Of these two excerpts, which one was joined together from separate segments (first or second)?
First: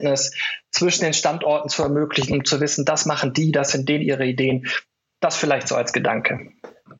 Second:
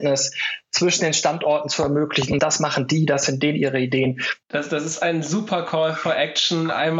second